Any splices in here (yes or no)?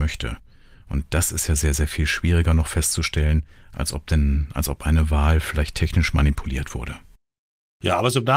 no